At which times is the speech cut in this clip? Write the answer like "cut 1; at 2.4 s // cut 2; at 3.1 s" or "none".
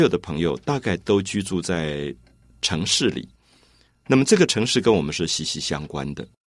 none